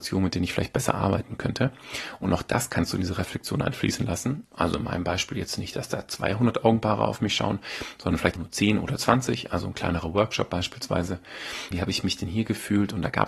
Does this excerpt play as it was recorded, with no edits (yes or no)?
no